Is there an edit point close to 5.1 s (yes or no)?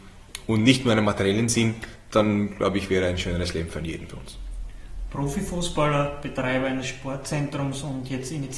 no